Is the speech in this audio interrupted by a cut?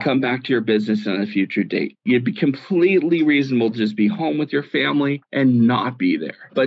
no; 0 cuts

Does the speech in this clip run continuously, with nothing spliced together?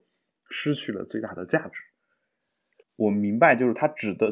no; 1 cut; at 2.8 s

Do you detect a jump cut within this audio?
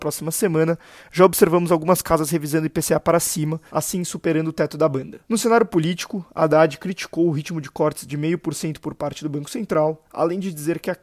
yes; 2 cuts; at 3.7 s, 5.2 s

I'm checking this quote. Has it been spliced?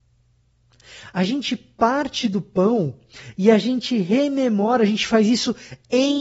no; 0 cuts

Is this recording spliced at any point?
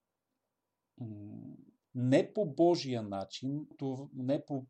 yes; 2 cuts; at 1.8 s, 3.7 s

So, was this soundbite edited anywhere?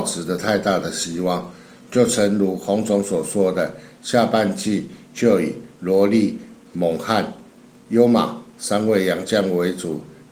no; 0 cuts

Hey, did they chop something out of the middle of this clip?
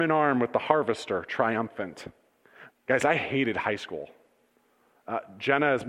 yes; 1 cut; at 2.7 s

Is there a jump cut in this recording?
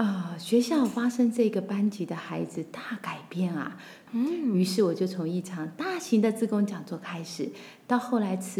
yes; 1 cut; at 4.1 s

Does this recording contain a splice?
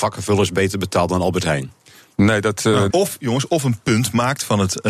yes; 1 cut; at 2.9 s

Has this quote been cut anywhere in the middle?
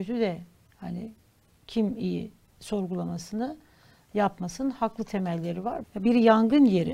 yes; 1 cut; at 5.8 s

